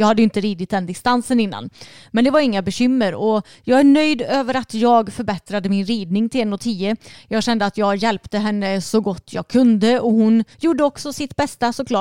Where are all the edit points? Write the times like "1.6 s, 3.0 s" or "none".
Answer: 10.5 s